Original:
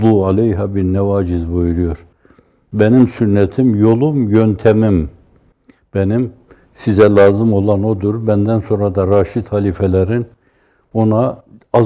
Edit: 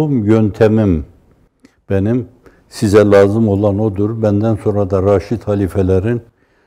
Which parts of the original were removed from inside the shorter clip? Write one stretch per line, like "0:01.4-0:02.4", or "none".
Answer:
none